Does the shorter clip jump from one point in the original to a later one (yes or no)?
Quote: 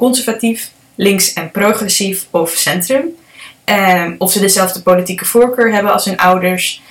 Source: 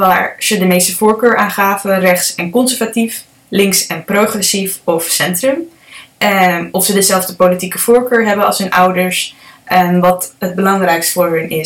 no